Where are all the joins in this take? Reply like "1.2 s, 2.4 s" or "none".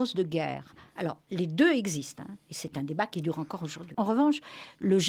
1.0 s, 3.9 s